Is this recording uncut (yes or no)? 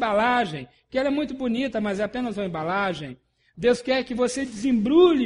yes